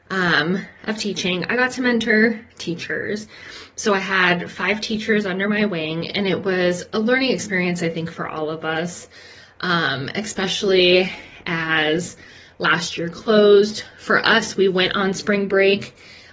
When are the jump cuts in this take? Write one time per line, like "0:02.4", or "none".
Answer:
none